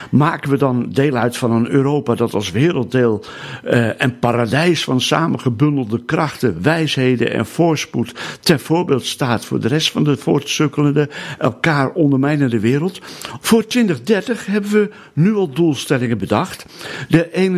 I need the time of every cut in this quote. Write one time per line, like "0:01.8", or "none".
0:13.4